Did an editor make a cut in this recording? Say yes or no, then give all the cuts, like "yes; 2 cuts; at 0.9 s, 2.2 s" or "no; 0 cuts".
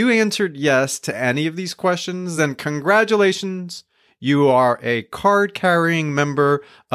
no; 0 cuts